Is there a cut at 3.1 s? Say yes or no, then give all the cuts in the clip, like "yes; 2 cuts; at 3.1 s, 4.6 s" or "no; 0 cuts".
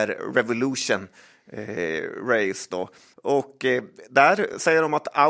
yes; 1 cut; at 3.1 s